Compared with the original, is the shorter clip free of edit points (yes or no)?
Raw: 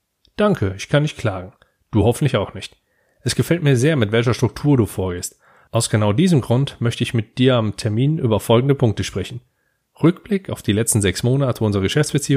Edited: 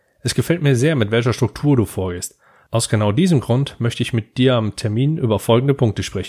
yes